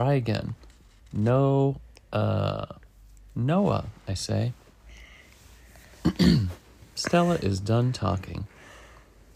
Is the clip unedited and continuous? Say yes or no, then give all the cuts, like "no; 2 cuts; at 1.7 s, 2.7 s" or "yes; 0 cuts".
yes; 0 cuts